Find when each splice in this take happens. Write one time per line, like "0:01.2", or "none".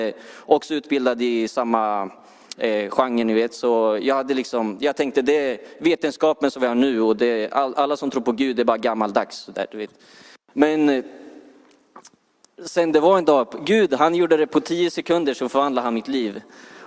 0:10.3